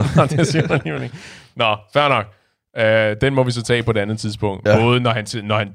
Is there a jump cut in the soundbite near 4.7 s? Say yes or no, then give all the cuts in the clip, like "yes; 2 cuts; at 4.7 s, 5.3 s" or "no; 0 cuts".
yes; 1 cut; at 4.7 s